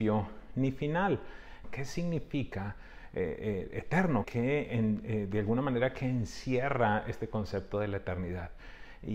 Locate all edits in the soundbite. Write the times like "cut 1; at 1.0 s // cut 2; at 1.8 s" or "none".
cut 1; at 1.6 s // cut 2; at 4.2 s